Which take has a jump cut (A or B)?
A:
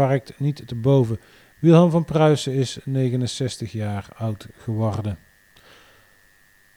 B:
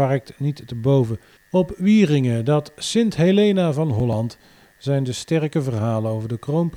B